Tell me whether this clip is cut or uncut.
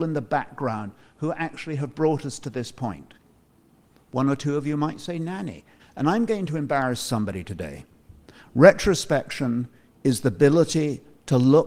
cut